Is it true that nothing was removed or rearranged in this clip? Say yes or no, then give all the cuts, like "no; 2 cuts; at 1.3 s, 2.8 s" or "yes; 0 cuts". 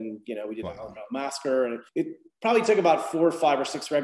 no; 1 cut; at 1.9 s